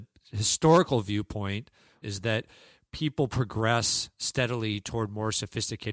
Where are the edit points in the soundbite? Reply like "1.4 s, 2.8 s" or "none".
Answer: 2.0 s